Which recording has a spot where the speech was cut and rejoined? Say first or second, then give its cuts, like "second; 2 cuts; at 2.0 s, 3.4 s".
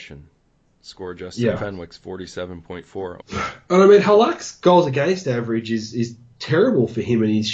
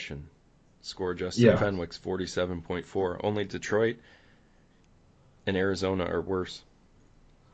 first; 1 cut; at 3.2 s